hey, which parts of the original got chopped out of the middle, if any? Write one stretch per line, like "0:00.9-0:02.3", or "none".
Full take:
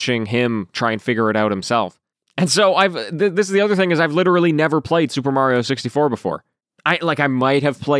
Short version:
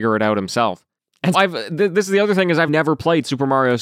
0:02.5-0:02.7
0:04.1-0:04.5

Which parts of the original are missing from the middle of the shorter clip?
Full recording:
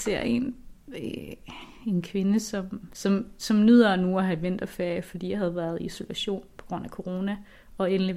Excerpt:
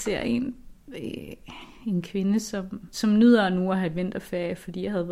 0:02.9-0:03.3

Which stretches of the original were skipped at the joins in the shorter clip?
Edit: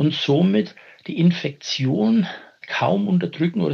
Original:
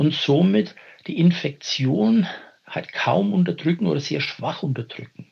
0:02.6-0:02.9

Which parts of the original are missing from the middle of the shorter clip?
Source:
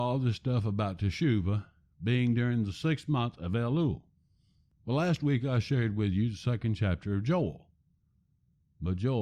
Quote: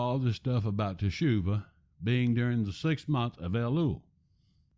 none

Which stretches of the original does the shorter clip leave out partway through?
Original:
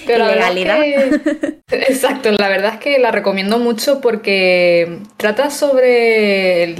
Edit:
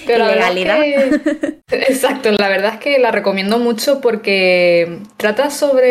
none

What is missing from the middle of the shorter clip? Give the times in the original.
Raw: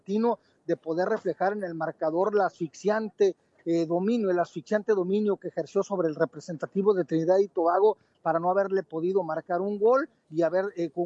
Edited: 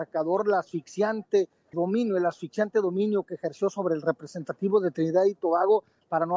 0:03.6-0:03.9

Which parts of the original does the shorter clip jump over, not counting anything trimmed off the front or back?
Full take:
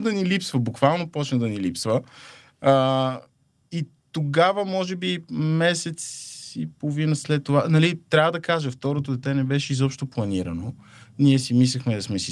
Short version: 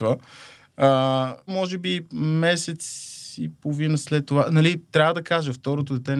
0:03.3-0:04.7

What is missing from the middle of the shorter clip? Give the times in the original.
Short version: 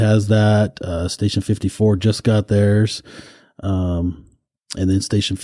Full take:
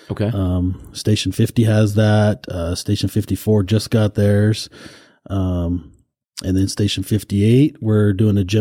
none

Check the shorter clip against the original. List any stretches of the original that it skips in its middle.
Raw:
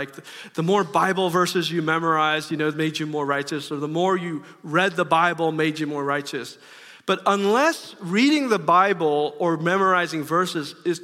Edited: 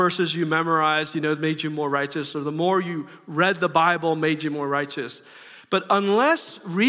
none

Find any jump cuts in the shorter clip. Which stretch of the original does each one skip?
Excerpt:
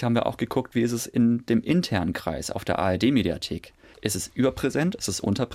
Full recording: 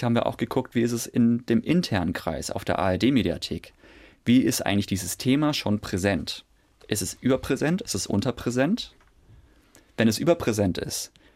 0:03.9-0:06.8

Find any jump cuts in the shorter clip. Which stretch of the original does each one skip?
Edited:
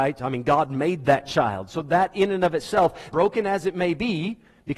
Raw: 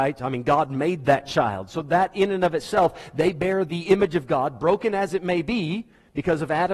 0:03.1-0:04.6

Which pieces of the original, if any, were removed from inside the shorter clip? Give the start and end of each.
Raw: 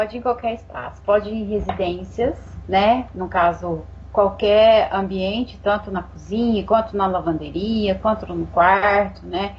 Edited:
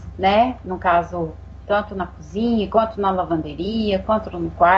0:04.1-0:05.6

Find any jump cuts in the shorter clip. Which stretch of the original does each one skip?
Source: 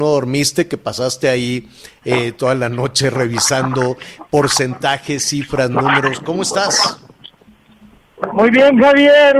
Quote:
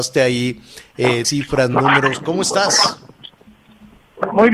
0:02.3-0:05.2

